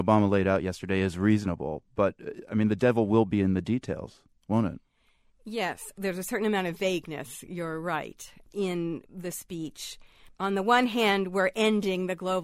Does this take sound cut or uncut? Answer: uncut